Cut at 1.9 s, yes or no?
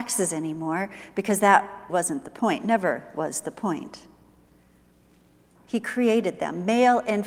yes